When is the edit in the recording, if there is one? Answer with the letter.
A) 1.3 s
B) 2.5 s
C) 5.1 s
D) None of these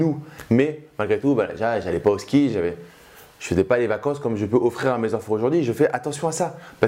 D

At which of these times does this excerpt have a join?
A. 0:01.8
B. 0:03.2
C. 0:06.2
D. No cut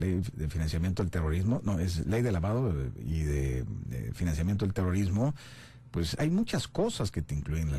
C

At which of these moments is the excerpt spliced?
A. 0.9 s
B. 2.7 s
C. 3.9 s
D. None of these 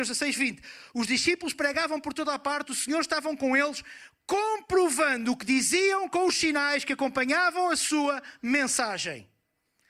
D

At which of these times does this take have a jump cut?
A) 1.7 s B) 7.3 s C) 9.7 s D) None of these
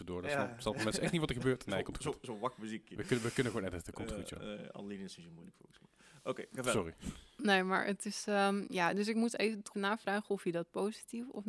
C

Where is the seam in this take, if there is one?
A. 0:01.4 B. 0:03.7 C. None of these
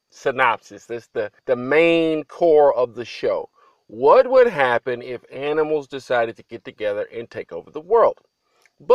A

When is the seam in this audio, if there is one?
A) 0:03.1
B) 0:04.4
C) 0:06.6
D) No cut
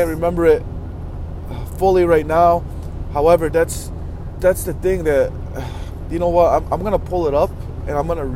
B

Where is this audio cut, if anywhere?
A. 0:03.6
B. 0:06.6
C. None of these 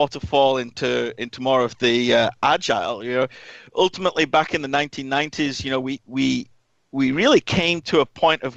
C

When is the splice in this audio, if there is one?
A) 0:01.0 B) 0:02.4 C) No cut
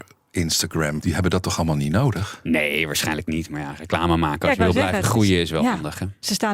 A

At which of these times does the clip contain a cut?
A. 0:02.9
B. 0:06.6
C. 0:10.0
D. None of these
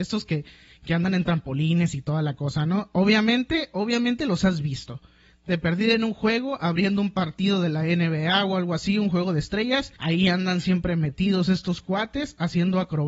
C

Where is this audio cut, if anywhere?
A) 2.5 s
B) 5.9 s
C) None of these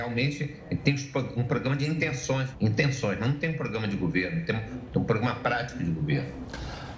A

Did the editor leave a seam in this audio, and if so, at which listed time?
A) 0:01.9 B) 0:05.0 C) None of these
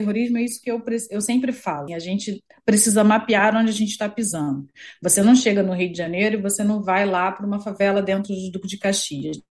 A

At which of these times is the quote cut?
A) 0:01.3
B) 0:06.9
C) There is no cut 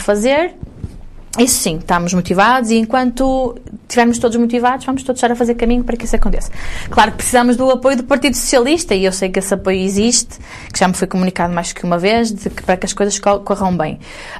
C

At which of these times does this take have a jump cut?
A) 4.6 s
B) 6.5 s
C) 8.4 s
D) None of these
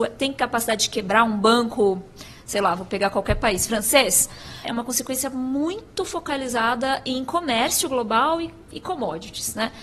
A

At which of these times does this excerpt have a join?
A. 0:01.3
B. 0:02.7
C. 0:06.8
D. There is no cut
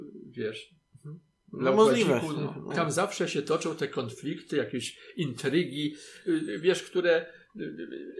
B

